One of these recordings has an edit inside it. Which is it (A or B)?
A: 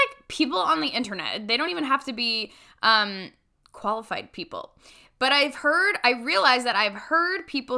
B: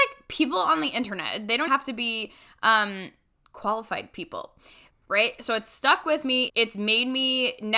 B